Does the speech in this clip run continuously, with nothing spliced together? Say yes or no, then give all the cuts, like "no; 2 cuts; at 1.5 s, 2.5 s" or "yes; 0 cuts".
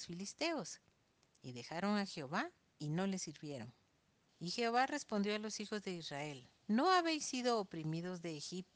no; 2 cuts; at 4.3 s, 6.6 s